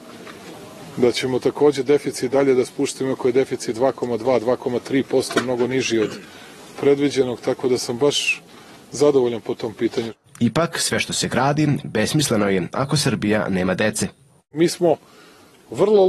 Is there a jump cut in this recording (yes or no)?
yes